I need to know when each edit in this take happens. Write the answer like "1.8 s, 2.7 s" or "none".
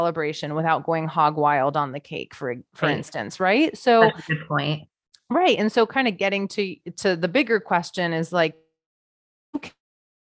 none